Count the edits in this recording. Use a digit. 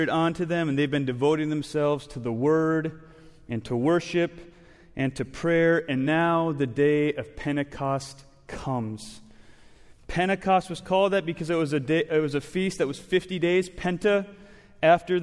0